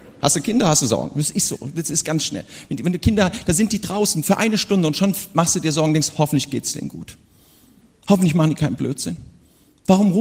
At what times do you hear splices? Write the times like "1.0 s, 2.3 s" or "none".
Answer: none